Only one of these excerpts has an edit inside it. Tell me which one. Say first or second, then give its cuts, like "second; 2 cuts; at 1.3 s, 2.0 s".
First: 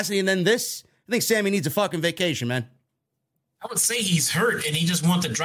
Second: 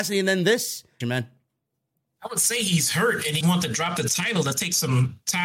second; 2 cuts; at 1.0 s, 3.4 s